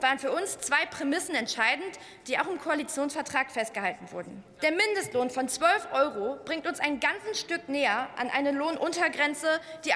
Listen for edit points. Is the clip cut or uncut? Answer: cut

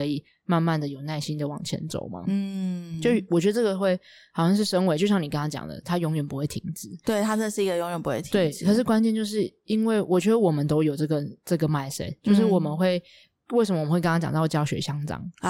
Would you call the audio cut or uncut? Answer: uncut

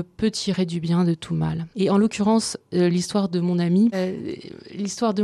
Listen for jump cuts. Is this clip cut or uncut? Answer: cut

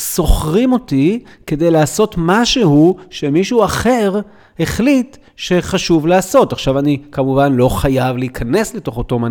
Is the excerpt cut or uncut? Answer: uncut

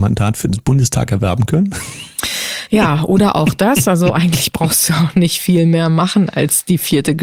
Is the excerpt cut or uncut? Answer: uncut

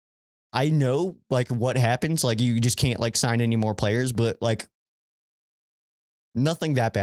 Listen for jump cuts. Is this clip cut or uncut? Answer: uncut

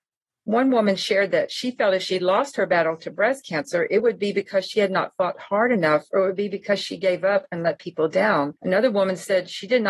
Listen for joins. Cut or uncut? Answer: cut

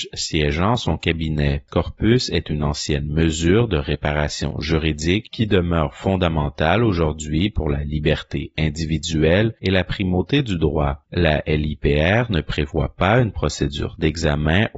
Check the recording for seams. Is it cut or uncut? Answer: cut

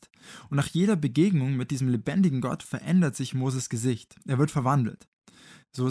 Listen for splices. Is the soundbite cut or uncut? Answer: uncut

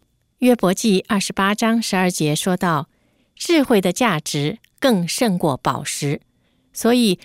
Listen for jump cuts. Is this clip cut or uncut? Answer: uncut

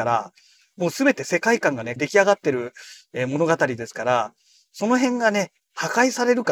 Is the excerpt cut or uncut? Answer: cut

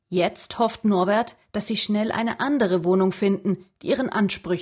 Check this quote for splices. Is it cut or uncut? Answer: uncut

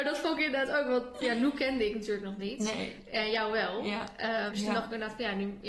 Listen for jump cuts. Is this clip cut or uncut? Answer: cut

